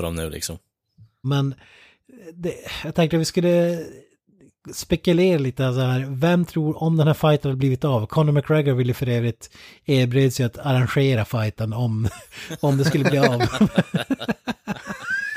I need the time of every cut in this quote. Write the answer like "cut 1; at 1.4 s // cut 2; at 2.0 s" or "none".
cut 1; at 1.2 s